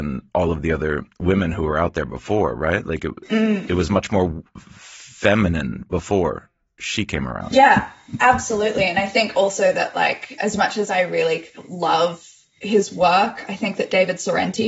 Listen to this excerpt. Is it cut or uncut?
uncut